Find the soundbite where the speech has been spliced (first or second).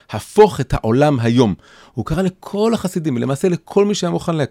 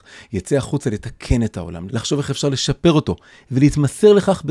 second